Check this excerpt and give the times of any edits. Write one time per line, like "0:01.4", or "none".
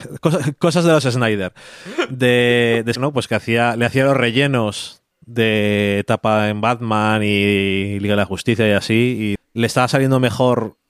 0:03.0
0:09.4

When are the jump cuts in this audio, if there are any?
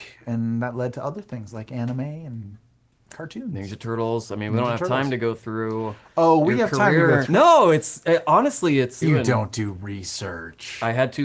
0:07.3
0:09.0

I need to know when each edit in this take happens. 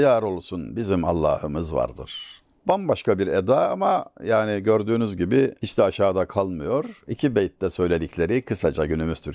none

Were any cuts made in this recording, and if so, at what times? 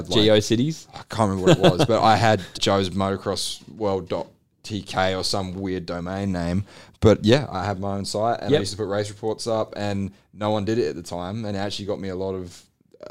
0:02.6

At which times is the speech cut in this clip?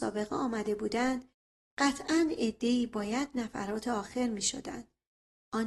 none

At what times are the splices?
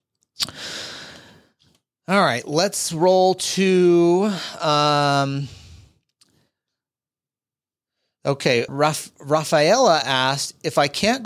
0:08.7

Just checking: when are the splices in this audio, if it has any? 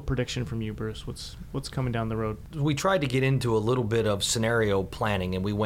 none

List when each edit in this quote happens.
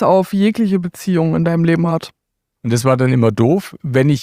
0:02.6

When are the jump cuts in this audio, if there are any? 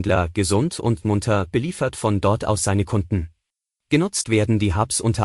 0:03.8

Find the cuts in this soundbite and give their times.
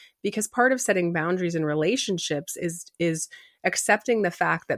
none

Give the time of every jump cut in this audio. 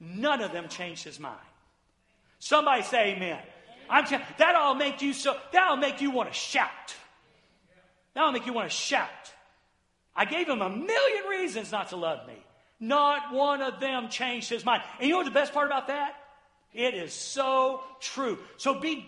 0:16.7

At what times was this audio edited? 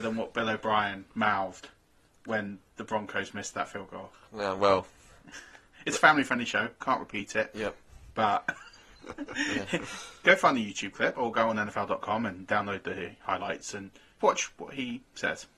0:14.2

